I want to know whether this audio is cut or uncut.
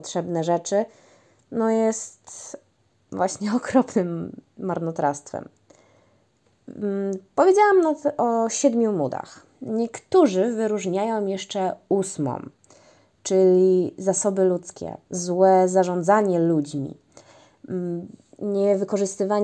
uncut